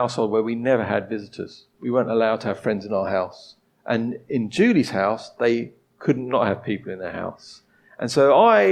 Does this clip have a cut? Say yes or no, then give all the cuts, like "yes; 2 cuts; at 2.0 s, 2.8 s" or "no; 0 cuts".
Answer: no; 0 cuts